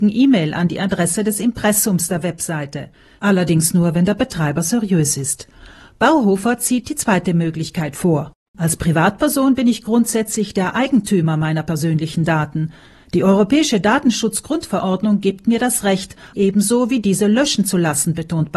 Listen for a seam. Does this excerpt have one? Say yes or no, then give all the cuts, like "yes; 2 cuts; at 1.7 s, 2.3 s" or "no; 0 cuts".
yes; 2 cuts; at 8.5 s, 16.3 s